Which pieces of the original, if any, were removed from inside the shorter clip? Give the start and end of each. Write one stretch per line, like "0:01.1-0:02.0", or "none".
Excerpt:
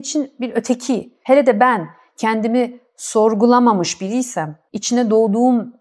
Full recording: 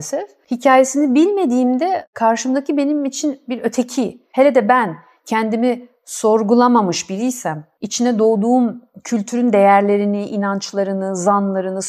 none